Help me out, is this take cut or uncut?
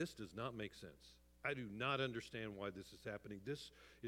uncut